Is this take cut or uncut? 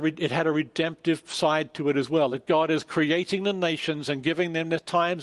uncut